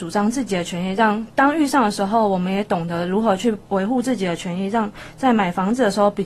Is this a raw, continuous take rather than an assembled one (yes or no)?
yes